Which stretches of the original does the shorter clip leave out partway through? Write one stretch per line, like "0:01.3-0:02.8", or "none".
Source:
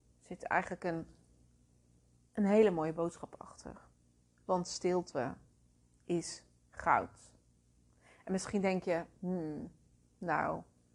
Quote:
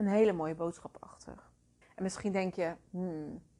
0:04.2-0:08.1

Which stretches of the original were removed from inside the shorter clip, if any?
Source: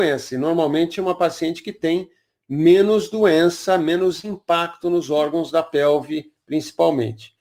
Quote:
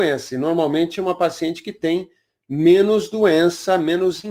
none

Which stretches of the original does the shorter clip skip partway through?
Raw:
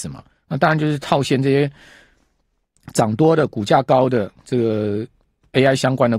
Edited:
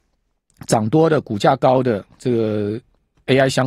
none

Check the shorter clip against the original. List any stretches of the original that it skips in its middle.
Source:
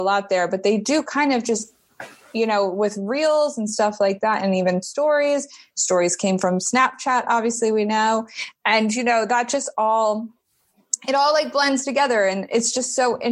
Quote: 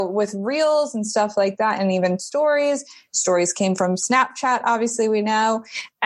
none

